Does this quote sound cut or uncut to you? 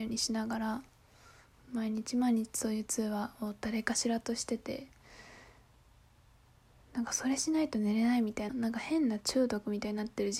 cut